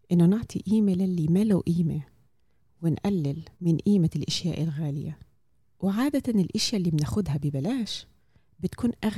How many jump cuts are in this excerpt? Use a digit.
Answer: 1